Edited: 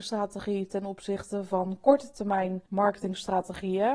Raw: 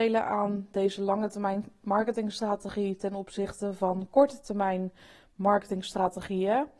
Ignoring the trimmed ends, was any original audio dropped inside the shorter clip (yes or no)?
yes